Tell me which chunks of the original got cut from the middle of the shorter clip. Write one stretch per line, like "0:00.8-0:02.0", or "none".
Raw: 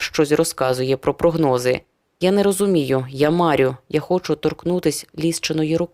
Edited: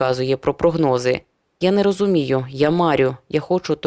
none